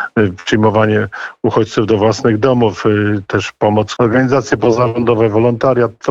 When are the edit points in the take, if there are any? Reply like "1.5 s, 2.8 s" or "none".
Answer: 4.0 s